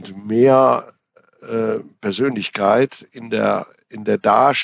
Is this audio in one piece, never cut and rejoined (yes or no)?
yes